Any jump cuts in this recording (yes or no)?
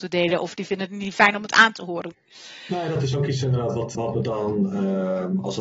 yes